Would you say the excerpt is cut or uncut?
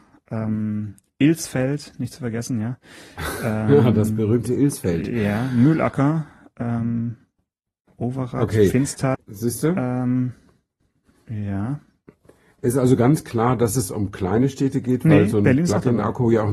cut